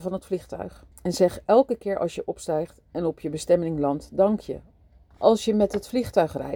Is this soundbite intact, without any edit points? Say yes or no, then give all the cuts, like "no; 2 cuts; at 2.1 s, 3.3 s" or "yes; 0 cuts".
no; 2 cuts; at 0.9 s, 5.1 s